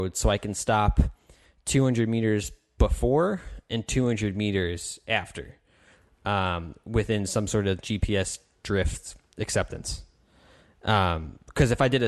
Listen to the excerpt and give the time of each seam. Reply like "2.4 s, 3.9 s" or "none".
7.8 s